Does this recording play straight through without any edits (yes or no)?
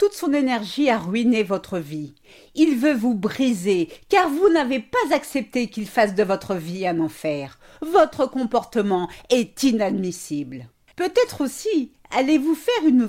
no